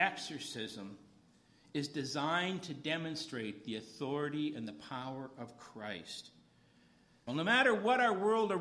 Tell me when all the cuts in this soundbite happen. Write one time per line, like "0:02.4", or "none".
0:07.3